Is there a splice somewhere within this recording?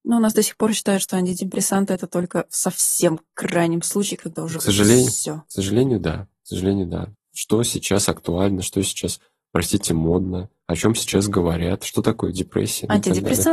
yes; 1 cut; at 7.1 s

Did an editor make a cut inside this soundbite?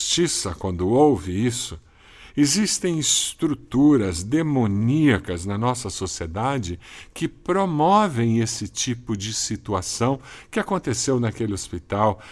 no; 0 cuts

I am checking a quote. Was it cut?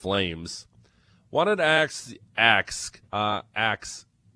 yes; 1 cut; at 3.1 s

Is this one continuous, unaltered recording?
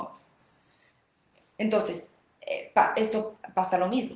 yes; 0 cuts

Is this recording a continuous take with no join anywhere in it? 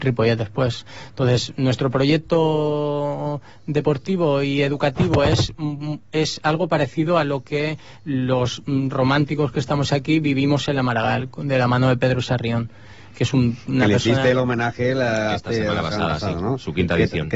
yes; 0 cuts

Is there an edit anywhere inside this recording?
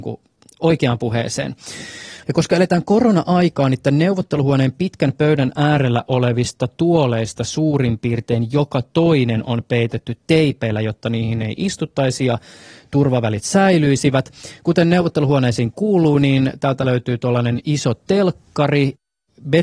yes; 1 cut; at 2.2 s

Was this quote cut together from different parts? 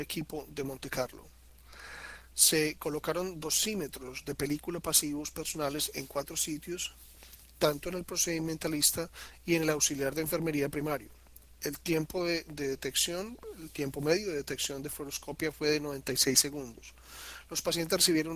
no; 0 cuts

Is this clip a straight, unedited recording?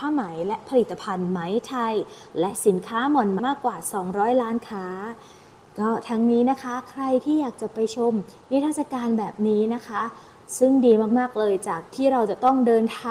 no; 1 cut; at 3.4 s

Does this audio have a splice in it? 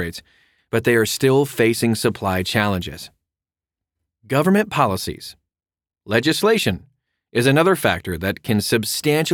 no; 0 cuts

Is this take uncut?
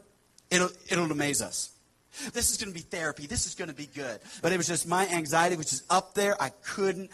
no; 2 cuts; at 2.3 s, 4.4 s

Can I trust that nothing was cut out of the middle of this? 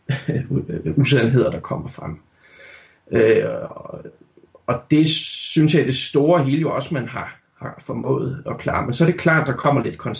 yes; 0 cuts

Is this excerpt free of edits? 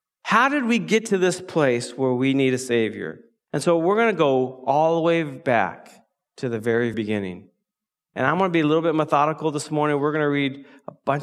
no; 1 cut; at 6.9 s

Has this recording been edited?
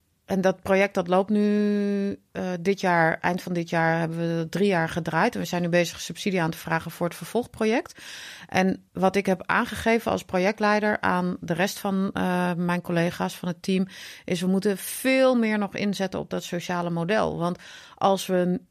yes; 1 cut; at 8.9 s

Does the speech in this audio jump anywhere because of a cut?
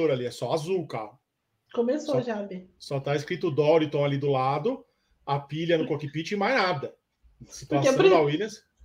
no; 0 cuts

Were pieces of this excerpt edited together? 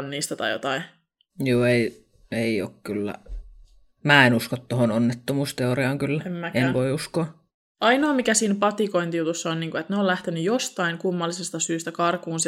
no; 0 cuts

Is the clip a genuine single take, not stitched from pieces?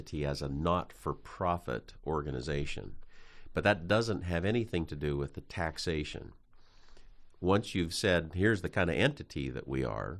yes; 0 cuts

